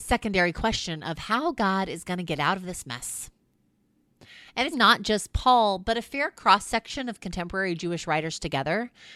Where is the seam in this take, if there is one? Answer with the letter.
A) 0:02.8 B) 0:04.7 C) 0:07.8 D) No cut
B